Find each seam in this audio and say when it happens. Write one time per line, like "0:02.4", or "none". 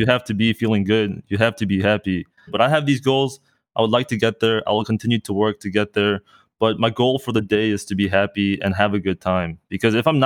0:02.5

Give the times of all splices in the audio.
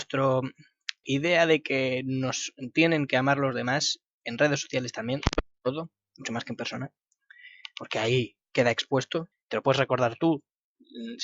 0:01.0
0:09.3

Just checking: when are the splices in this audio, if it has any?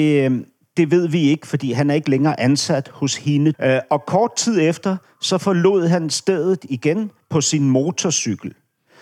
0:03.5

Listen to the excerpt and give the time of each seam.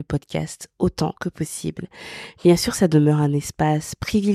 none

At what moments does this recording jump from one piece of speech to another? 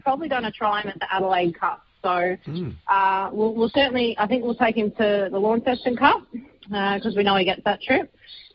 none

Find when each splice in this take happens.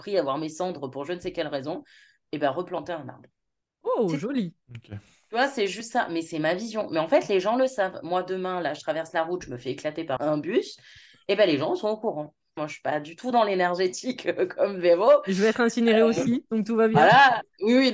0:10.2
0:12.6

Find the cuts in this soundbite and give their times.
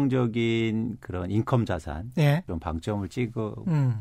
0:02.5

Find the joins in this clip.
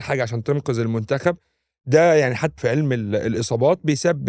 0:02.6

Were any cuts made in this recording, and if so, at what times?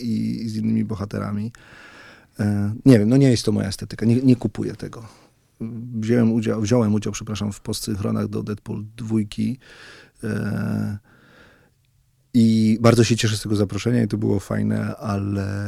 none

